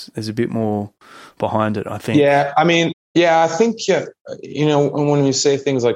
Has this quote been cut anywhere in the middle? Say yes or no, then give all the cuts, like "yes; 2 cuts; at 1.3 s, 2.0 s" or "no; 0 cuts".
yes; 1 cut; at 2.9 s